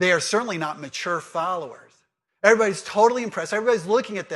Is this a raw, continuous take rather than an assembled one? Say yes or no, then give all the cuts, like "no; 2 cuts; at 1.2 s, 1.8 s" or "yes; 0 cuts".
no; 1 cut; at 2.3 s